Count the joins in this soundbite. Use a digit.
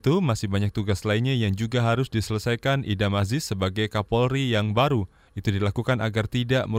1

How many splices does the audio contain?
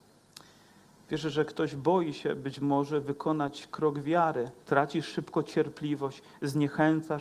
1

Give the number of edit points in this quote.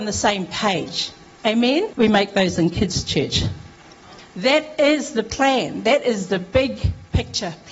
2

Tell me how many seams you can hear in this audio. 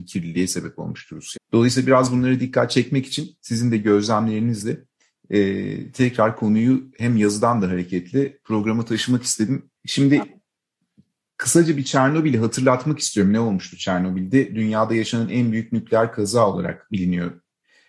2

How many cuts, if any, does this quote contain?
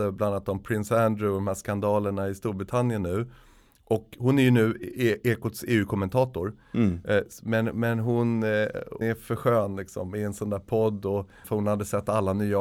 2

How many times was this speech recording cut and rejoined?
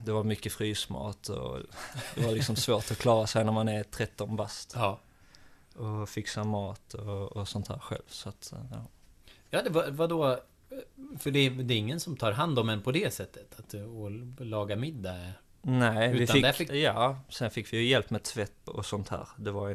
2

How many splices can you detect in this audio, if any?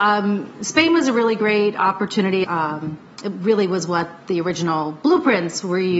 1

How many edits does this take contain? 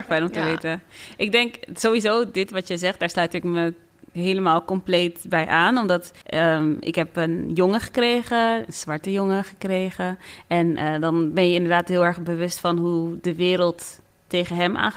1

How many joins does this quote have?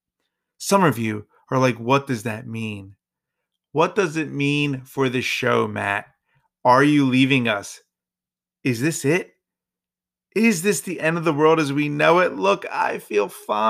0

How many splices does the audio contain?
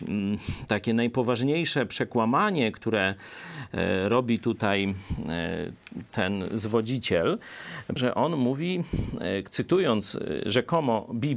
1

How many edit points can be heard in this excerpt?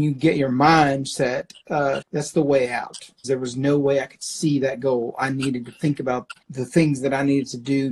3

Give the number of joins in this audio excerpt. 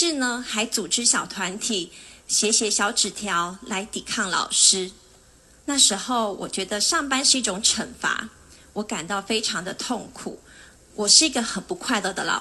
0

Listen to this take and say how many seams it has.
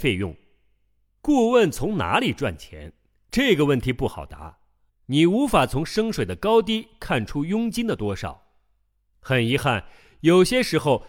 1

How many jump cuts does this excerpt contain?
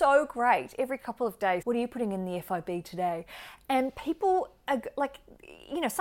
1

